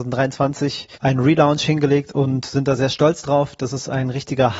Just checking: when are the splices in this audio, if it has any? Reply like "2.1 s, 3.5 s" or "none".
0.9 s

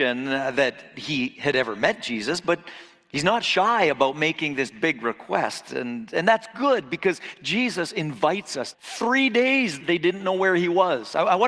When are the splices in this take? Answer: 8.7 s, 9.8 s

